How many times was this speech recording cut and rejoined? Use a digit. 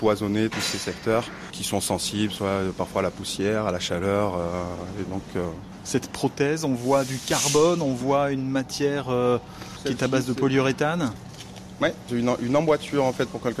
2